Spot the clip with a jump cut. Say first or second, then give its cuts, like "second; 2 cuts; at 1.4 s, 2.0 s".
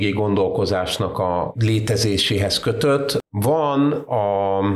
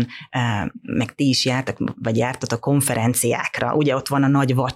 first; 1 cut; at 3.2 s